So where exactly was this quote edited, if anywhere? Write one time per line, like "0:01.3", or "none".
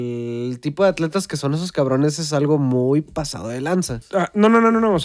0:04.0